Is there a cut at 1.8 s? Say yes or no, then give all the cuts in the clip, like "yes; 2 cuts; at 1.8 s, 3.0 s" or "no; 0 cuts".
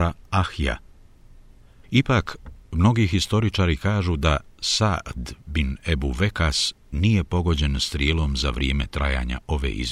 yes; 1 cut; at 1.8 s